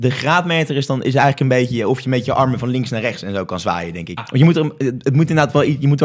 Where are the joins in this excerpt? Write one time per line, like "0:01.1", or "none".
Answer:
0:04.2